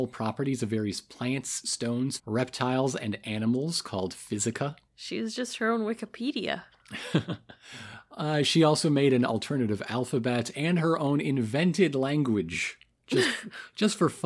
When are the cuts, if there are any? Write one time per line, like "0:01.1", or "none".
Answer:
0:02.2
0:04.9